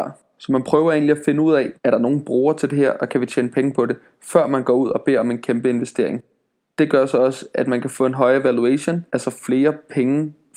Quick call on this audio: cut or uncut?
cut